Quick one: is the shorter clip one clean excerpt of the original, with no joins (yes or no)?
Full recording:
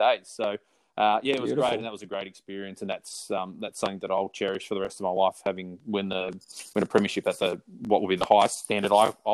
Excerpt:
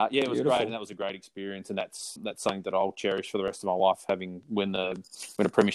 no